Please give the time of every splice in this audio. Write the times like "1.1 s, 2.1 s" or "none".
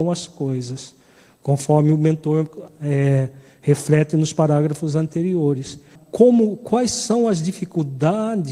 6.0 s